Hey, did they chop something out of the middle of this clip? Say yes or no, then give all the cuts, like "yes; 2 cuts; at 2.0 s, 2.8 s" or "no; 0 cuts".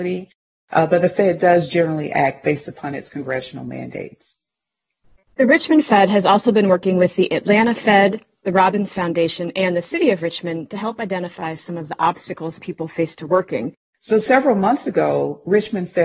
yes; 1 cut; at 13.9 s